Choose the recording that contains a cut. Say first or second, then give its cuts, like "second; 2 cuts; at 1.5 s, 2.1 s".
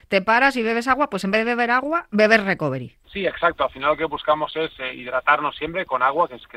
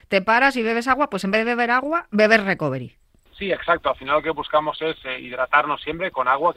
first; 1 cut; at 3.0 s